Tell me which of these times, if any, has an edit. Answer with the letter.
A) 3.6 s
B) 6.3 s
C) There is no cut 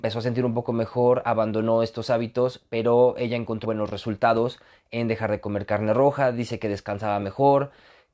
A